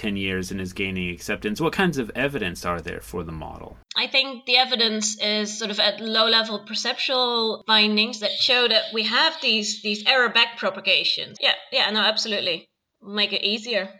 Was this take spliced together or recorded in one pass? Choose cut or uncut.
cut